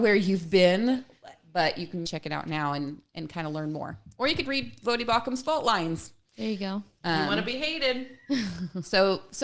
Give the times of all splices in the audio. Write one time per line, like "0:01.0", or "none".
0:02.0